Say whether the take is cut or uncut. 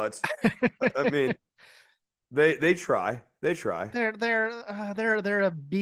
uncut